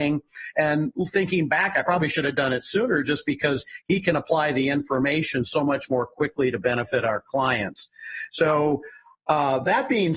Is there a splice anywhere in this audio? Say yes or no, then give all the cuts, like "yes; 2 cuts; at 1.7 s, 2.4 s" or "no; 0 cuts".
no; 0 cuts